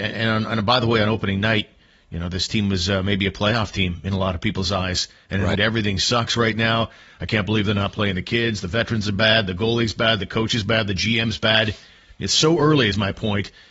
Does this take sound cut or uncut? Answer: cut